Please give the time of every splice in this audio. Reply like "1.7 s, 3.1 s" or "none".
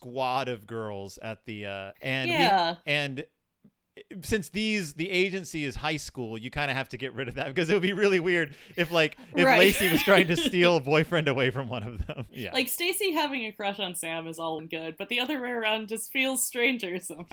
1.9 s, 12.3 s, 14.6 s